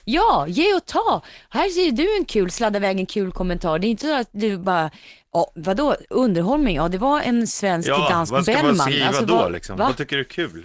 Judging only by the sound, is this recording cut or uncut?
uncut